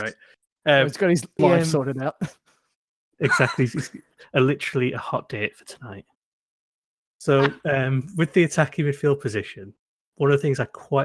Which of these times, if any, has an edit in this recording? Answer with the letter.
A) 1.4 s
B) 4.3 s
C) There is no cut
A